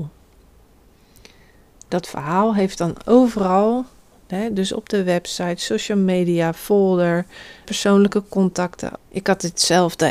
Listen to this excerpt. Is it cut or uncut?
cut